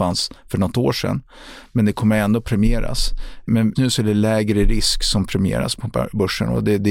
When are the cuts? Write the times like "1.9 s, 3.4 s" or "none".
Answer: 3.8 s